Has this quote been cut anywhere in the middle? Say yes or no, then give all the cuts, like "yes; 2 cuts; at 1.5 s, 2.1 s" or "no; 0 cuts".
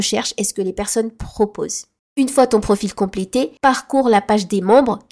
yes; 2 cuts; at 2.0 s, 3.6 s